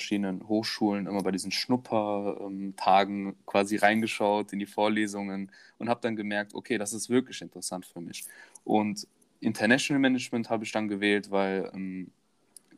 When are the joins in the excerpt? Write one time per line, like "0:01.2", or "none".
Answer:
none